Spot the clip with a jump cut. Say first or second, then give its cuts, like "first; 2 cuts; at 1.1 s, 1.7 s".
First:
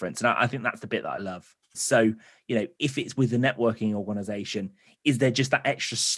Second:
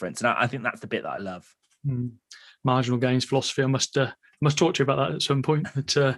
first; 1 cut; at 1.7 s